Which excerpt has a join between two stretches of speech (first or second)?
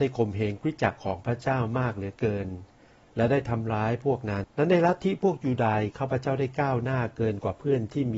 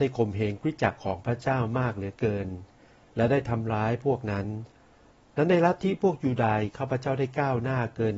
first